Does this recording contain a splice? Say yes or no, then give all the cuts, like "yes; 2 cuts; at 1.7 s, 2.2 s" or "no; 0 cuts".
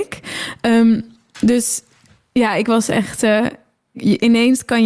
yes; 1 cut; at 3.9 s